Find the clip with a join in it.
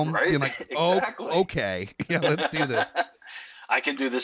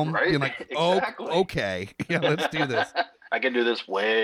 second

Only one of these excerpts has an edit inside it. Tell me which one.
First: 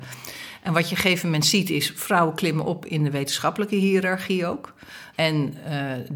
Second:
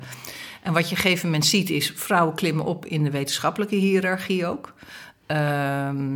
first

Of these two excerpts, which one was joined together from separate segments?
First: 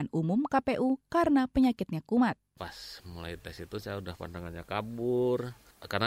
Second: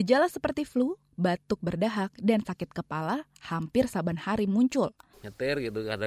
second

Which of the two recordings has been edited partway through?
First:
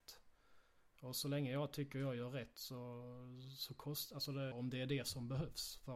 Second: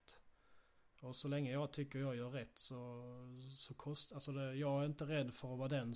first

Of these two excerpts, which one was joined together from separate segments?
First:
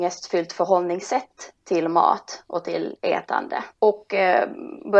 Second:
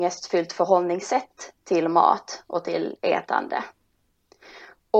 first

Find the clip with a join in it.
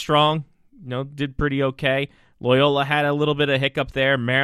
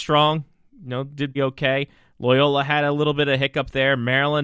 second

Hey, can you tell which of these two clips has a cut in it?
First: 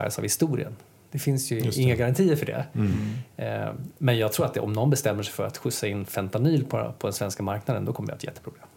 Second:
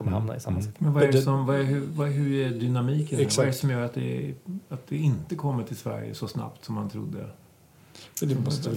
first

